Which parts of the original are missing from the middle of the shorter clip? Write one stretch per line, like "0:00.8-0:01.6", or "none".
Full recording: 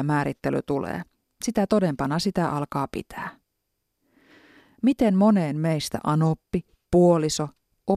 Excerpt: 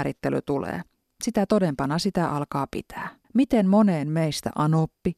0:03.4-0:04.7